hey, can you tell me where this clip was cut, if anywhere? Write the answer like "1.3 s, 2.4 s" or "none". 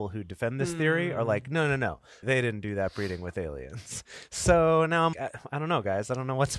2.2 s, 5.1 s